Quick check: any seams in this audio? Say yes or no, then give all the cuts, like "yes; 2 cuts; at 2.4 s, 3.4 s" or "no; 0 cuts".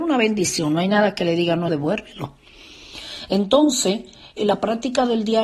yes; 2 cuts; at 1.7 s, 4.4 s